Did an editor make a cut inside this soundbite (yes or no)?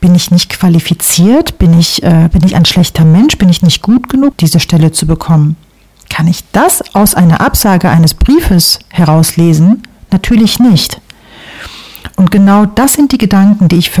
yes